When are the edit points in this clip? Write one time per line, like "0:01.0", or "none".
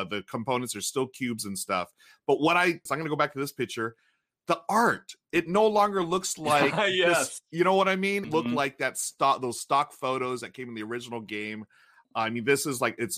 0:02.9
0:08.2

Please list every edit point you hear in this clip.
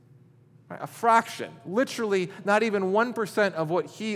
none

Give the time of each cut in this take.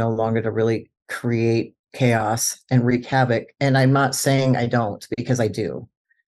0:01.8
0:03.5

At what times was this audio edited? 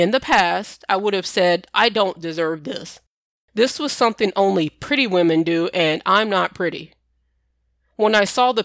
none

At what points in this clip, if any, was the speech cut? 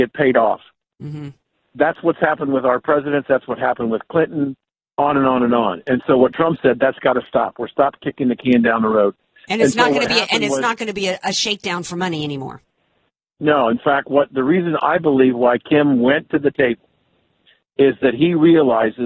none

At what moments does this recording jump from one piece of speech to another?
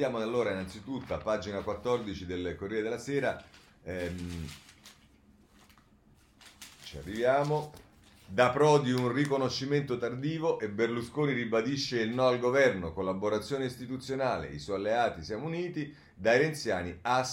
none

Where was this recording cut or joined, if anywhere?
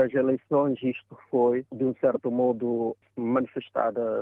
none

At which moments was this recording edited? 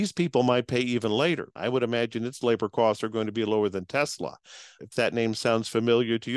0:01.6
0:04.8

